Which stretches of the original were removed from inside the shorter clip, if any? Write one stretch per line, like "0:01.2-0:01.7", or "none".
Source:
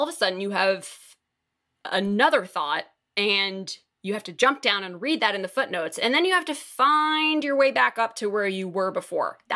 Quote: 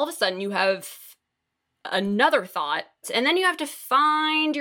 0:03.0-0:05.9

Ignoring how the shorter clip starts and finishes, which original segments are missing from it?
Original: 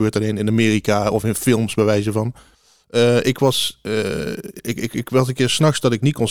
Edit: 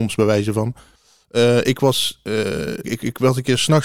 0:04.4-0:04.7

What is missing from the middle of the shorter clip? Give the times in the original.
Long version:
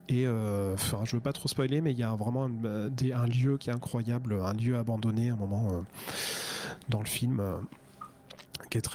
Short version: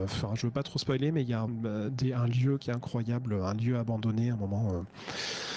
0:02.2-0:02.5

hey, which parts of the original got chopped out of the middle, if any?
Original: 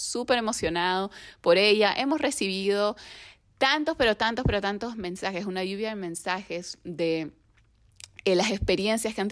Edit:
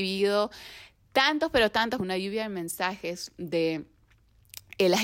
0:04.4-0:05.4

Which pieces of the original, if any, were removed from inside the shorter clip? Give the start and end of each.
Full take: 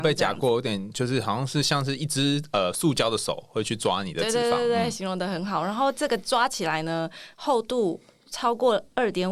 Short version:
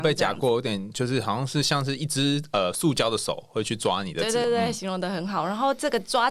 0:04.4-0:04.6

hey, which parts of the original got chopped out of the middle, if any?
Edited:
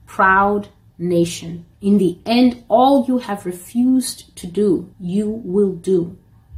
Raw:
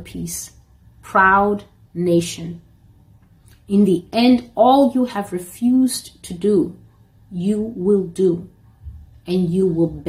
0:02.7-0:03.6
0:06.8-0:07.2

